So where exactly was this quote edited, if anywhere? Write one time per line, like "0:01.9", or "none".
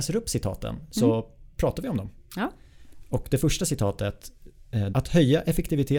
0:04.9